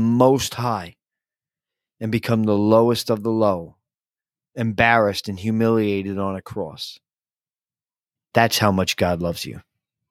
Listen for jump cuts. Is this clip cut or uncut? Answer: cut